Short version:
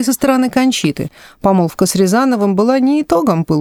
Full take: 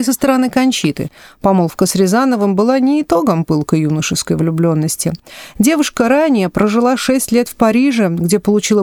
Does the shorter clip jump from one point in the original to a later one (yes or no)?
no